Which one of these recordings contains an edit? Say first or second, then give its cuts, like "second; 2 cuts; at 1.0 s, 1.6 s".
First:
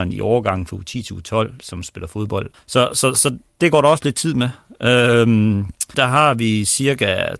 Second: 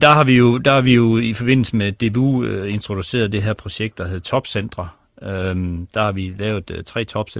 first; 2 cuts; at 2.5 s, 5.9 s